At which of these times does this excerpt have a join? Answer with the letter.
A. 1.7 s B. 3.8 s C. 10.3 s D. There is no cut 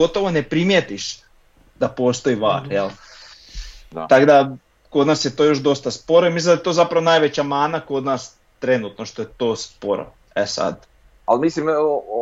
D